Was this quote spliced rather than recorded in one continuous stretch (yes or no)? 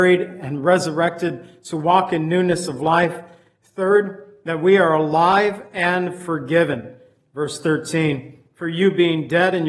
no